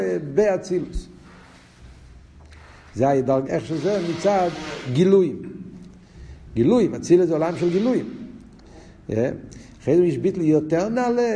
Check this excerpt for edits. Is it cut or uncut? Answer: cut